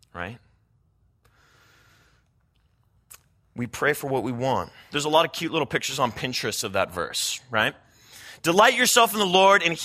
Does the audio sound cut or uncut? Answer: cut